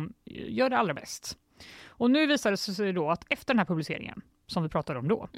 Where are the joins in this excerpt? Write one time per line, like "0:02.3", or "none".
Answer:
none